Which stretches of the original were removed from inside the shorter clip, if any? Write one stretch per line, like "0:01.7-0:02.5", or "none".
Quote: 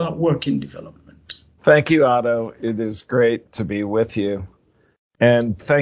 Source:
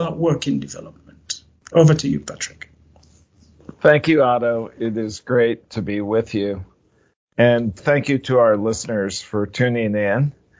0:01.6-0:03.7